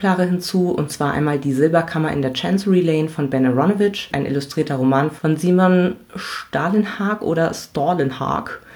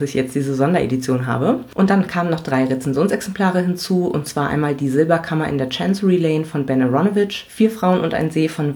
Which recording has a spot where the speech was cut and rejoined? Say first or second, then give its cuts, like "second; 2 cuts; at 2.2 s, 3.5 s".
first; 1 cut; at 4.1 s